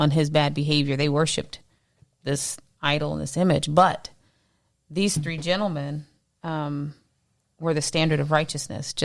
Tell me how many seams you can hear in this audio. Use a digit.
0